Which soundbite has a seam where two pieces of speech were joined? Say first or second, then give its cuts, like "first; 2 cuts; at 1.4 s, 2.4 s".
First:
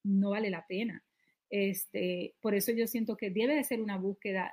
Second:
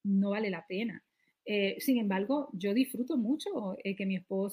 second; 1 cut; at 1.3 s